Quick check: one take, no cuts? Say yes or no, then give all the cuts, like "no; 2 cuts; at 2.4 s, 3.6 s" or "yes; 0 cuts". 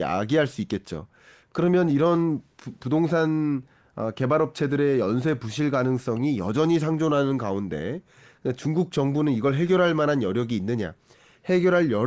yes; 0 cuts